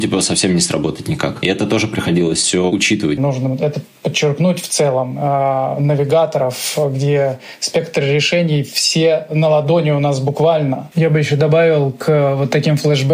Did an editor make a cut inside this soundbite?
yes; 2 cuts; at 3.2 s, 10.9 s

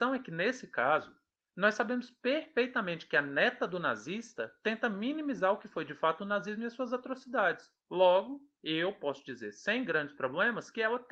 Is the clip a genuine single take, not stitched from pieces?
yes; 0 cuts

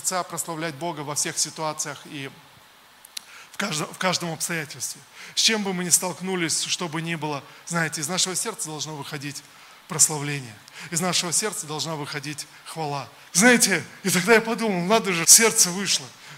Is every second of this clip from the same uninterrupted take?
no; 2 cuts; at 13.3 s, 15.2 s

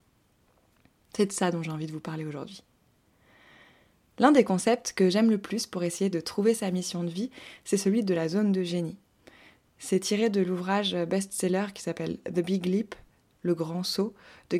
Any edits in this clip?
no; 0 cuts

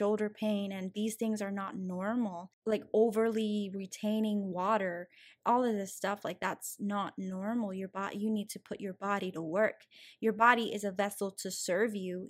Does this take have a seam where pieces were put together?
no; 0 cuts

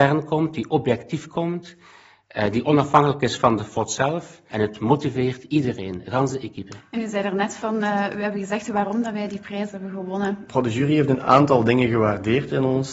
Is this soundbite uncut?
no; 2 cuts; at 4.5 s, 10.5 s

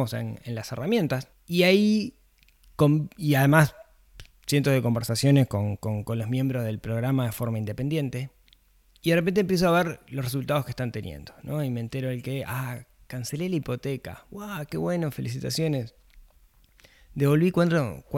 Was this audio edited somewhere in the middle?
no; 0 cuts

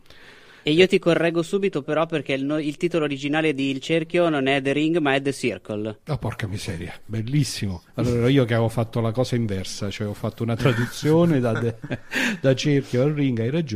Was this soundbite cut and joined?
no; 0 cuts

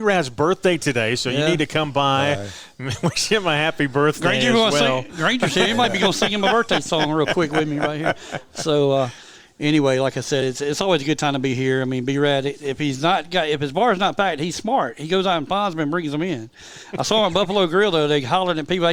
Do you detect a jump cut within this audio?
no; 0 cuts

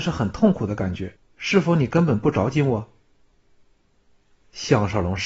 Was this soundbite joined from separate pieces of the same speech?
yes; 1 cut; at 1.1 s

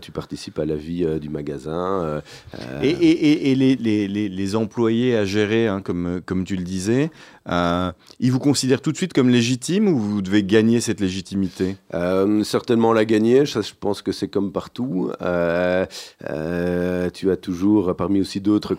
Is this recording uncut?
yes; 0 cuts

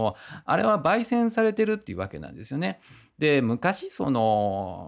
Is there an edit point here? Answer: no; 0 cuts

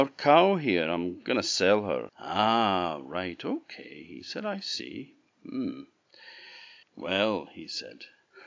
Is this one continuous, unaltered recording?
no; 2 cuts; at 2.1 s, 6.8 s

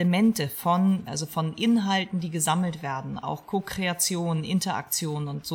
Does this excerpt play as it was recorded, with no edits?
no; 1 cut; at 1.1 s

